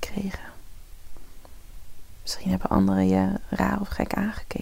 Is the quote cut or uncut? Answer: uncut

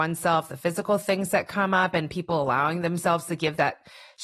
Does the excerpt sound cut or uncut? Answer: uncut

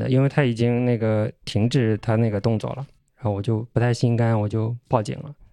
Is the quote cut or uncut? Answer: cut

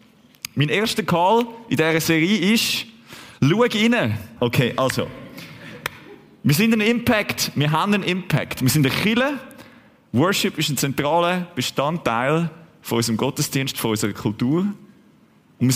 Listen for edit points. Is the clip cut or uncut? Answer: cut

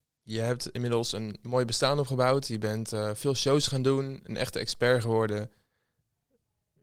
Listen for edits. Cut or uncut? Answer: uncut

